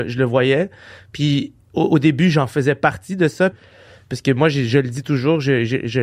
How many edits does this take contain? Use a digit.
1